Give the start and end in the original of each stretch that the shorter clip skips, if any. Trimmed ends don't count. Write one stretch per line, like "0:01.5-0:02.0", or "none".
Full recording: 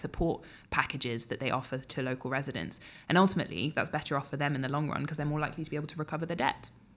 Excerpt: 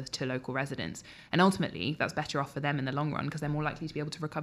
none